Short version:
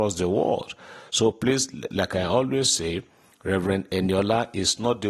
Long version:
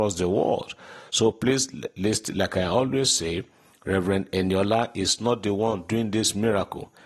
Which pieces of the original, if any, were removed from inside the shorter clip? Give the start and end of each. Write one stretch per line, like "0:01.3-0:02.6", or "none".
0:01.9-0:02.3